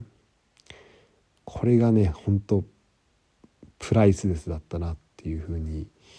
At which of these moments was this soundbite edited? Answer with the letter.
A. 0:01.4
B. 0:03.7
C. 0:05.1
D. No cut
D